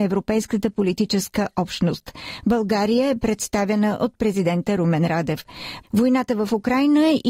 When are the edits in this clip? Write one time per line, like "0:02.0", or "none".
0:02.4
0:05.8